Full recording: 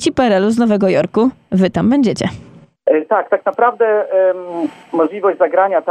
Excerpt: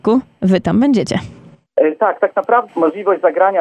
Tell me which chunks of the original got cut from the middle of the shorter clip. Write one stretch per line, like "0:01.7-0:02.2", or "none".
0:03.8-0:04.8

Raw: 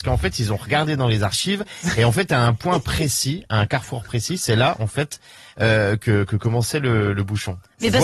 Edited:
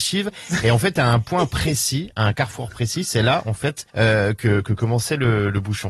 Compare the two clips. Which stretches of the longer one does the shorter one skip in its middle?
0:05.2-0:05.5

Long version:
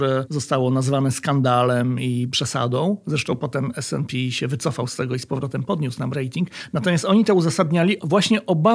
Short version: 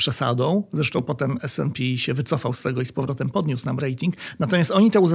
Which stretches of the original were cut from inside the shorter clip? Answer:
none

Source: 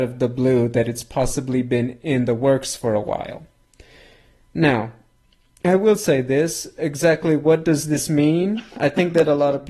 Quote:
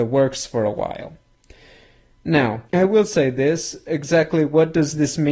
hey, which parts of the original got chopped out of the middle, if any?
0:05.0-0:05.6

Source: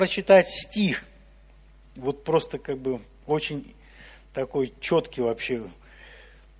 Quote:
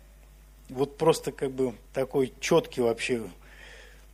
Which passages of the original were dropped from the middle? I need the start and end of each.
0:03.1-0:04.2

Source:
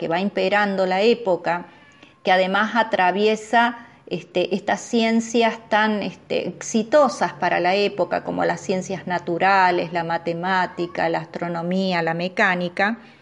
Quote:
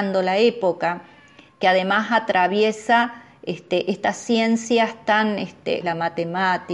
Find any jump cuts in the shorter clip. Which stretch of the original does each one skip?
0:06.4-0:09.9

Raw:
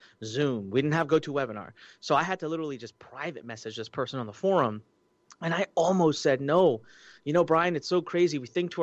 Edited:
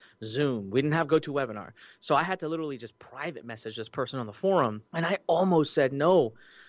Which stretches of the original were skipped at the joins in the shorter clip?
0:04.9-0:05.3

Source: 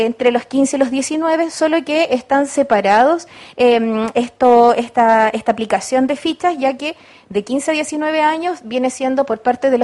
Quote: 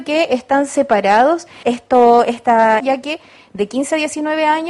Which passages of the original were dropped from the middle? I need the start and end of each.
0:03.4-0:04.1
0:05.3-0:06.6

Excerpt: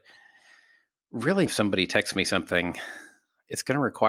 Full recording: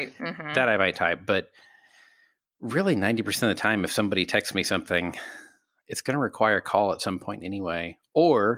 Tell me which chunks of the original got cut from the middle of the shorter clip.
0:03.0-0:03.9

